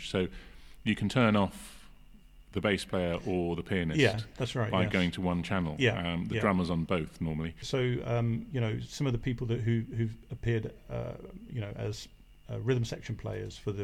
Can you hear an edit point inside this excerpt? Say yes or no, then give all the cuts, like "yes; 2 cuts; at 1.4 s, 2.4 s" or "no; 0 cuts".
yes; 1 cut; at 7.6 s